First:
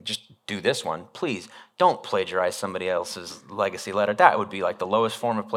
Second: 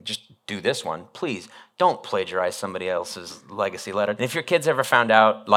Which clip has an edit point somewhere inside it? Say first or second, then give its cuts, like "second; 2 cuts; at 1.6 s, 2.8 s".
second; 1 cut; at 4.2 s